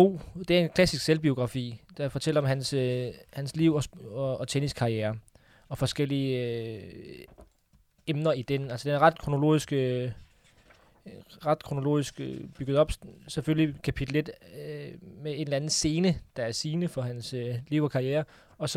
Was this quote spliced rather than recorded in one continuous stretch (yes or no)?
no